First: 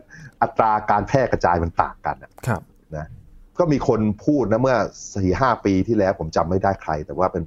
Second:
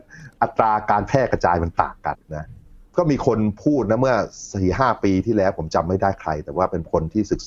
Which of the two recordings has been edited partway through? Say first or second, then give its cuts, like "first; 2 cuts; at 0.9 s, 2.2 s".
second; 1 cut; at 2.1 s